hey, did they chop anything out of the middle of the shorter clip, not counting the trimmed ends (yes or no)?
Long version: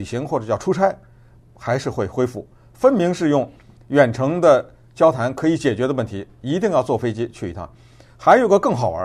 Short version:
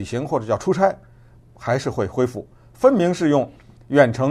no